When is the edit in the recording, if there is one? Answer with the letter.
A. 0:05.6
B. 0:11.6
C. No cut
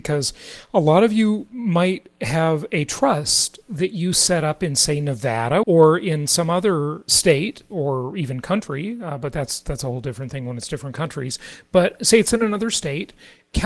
A